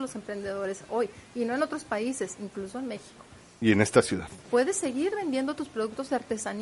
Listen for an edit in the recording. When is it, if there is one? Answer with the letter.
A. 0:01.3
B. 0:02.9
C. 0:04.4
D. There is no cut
C